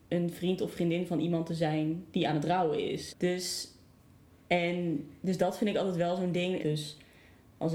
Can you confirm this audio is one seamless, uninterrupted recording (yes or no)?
no